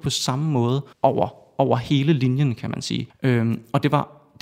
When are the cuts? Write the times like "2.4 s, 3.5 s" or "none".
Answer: 0.9 s, 3.1 s